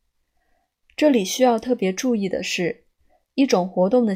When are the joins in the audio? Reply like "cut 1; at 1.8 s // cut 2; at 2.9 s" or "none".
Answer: none